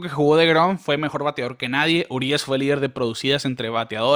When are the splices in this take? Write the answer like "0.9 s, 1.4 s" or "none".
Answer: none